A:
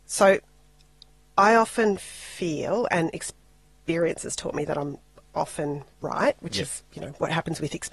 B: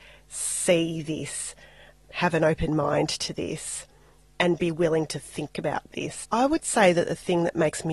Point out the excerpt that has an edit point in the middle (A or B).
B